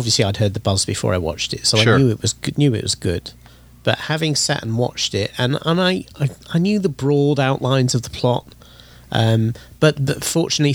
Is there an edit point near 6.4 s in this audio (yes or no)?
no